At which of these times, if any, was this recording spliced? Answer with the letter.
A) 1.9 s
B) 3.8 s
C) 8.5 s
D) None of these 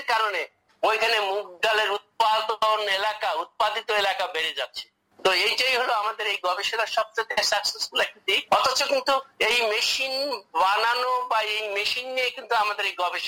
C